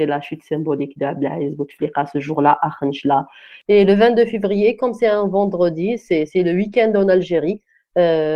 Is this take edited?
no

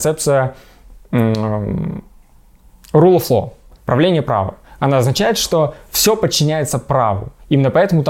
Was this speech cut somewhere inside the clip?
no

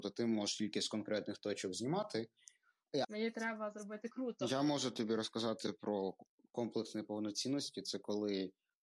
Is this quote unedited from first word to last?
no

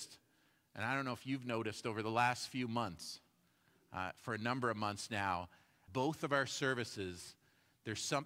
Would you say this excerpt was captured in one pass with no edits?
no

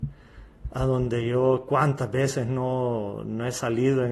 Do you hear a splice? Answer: no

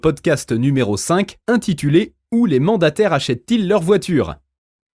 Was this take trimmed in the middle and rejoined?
no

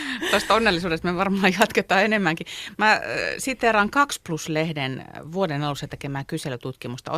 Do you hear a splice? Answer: no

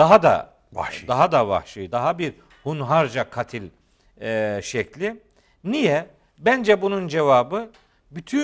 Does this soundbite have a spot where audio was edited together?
no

